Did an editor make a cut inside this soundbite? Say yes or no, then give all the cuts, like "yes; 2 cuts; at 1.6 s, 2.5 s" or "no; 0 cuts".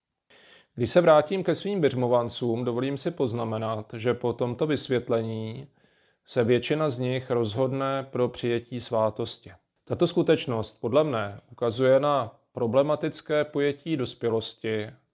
yes; 1 cut; at 9.8 s